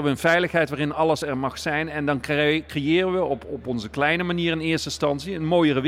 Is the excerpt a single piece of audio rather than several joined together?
yes; 0 cuts

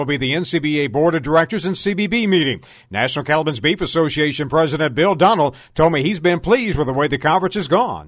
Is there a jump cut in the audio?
no; 0 cuts

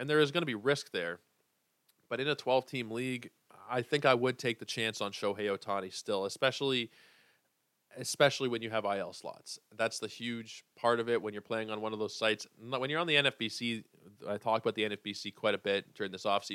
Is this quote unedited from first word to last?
yes; 0 cuts

